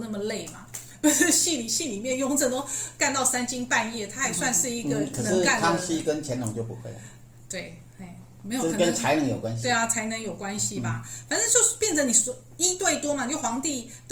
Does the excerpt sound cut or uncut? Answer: uncut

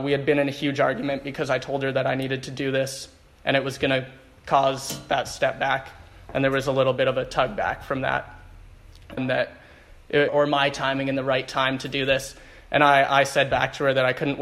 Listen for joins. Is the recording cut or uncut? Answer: cut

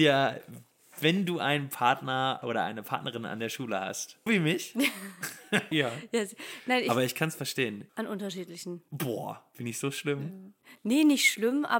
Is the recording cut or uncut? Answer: cut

